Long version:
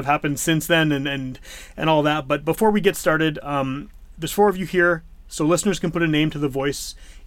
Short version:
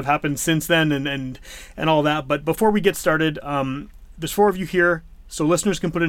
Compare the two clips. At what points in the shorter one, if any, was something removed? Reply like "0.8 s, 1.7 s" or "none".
none